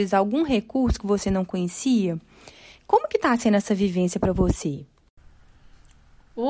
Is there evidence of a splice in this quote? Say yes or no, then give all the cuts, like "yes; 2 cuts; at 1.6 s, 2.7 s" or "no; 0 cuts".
no; 0 cuts